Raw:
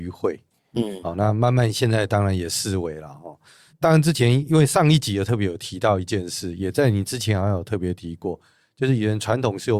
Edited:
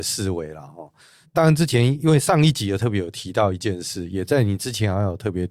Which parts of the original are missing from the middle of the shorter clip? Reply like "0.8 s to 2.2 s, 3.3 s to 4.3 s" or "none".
none